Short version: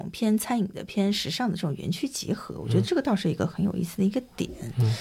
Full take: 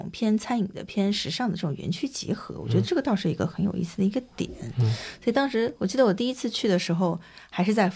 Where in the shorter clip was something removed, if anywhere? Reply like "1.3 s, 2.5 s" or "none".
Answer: none